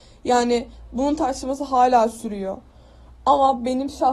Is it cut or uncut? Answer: uncut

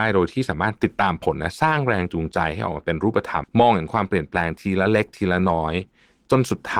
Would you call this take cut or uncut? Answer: cut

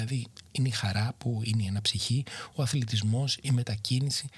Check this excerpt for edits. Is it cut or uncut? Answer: uncut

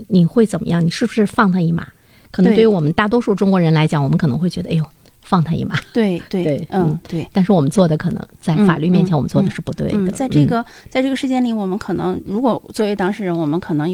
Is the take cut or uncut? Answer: uncut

